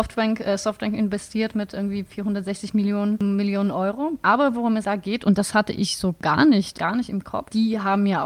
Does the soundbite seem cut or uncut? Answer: uncut